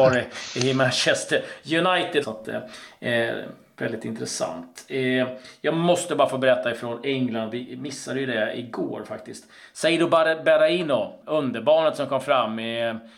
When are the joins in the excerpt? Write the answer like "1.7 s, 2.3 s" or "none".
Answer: 2.2 s, 11.2 s